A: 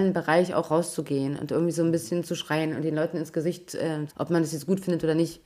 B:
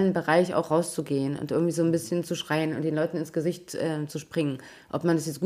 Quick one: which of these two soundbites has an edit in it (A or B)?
A